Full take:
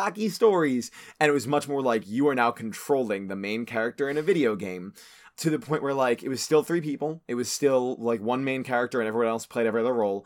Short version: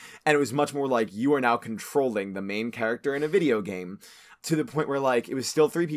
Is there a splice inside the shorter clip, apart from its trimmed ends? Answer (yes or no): no